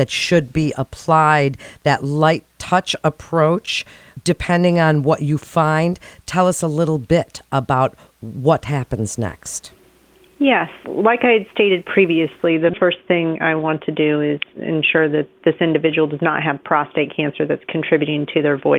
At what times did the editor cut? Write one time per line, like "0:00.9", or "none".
0:10.8
0:12.7